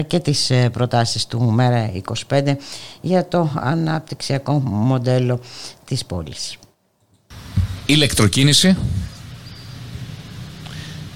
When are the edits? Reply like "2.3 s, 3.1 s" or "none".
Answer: 7.8 s